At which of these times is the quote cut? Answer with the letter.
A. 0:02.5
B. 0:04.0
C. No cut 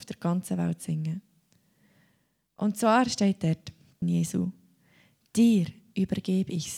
B